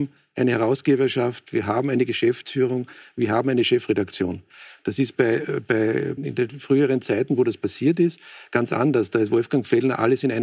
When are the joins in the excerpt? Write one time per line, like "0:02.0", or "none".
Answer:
0:06.2